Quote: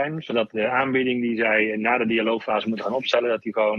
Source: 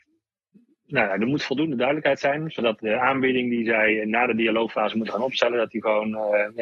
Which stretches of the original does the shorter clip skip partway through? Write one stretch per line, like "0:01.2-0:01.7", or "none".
none

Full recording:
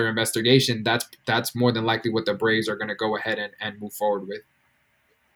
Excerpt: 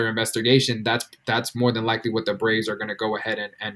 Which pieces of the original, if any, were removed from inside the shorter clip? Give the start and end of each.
none

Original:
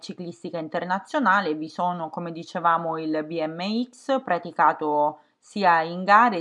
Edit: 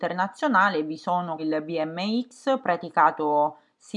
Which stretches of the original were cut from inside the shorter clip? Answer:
0:02.1-0:03.0

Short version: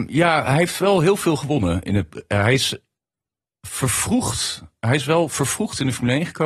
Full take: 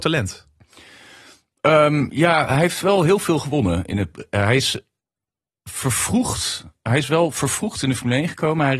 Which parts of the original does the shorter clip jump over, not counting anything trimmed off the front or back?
none

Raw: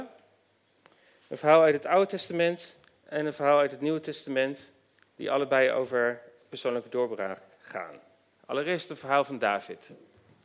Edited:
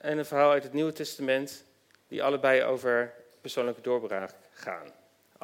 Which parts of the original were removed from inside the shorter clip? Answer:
none

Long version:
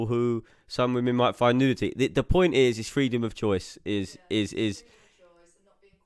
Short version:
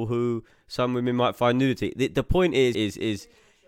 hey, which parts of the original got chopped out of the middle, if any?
0:02.7-0:04.3

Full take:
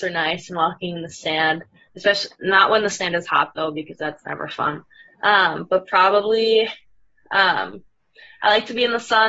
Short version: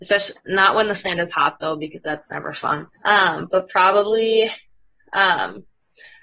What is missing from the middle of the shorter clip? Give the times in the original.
0:04.9-0:05.1

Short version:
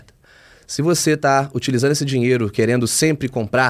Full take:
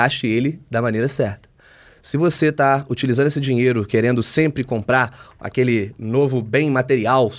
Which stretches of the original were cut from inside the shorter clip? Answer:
none

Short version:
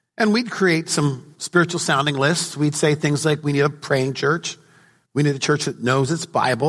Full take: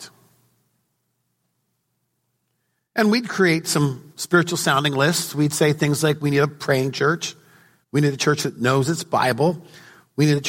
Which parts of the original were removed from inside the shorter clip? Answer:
none

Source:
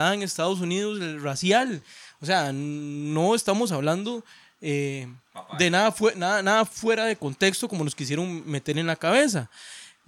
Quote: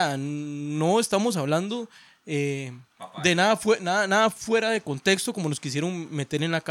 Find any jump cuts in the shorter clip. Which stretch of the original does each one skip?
none

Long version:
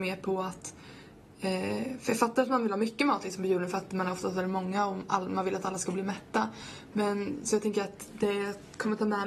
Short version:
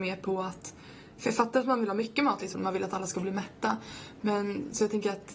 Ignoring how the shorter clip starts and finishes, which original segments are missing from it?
0:01.2-0:02.0
0:03.4-0:05.2

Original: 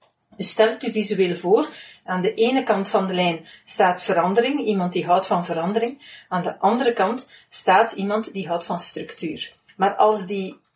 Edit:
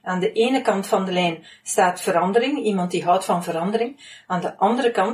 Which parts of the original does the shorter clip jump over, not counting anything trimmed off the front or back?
none

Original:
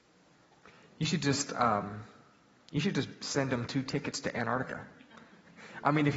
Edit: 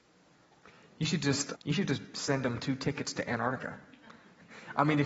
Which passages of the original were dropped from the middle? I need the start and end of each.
0:01.5-0:02.6

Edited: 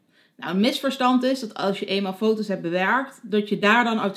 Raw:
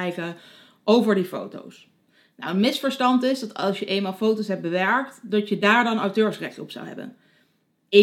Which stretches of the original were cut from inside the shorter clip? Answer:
none

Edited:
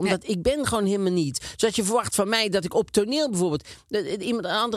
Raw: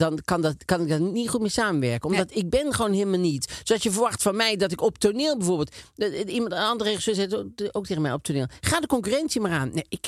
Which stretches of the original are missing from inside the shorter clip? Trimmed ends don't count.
none

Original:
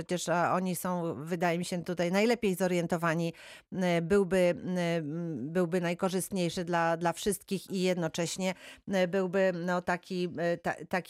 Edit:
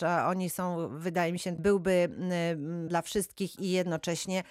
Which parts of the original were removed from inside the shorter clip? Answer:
0:01.8-0:04.0
0:05.3-0:07.0

